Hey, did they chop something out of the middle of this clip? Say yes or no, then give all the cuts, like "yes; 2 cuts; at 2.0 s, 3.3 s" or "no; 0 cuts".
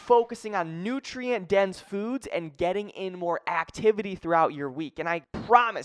no; 0 cuts